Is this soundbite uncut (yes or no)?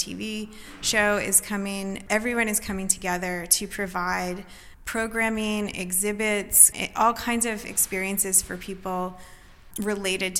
no